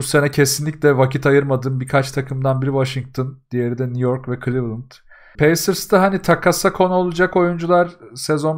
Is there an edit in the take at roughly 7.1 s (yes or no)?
no